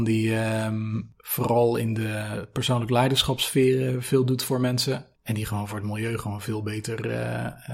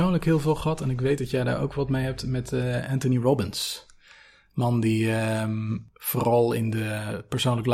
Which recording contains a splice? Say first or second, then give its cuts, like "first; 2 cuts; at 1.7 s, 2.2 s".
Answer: first; 1 cut; at 5.1 s